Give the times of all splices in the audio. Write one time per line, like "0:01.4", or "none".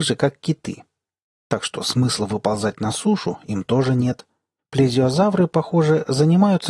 0:04.6